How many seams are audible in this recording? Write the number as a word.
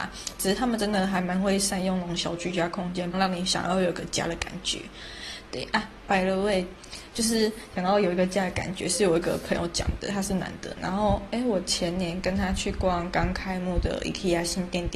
one